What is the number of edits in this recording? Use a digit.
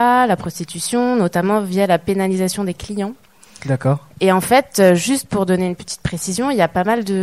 1